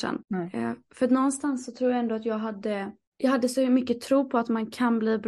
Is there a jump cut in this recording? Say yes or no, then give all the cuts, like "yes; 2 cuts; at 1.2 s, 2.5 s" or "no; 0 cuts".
no; 0 cuts